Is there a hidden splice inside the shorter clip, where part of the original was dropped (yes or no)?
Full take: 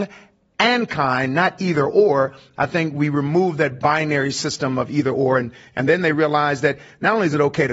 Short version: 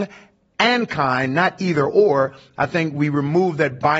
no